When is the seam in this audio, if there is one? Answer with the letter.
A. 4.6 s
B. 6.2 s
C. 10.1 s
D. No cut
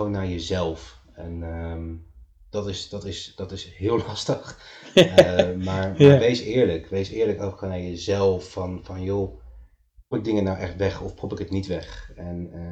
C